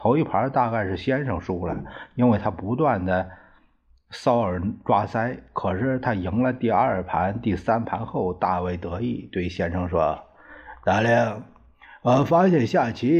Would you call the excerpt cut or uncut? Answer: uncut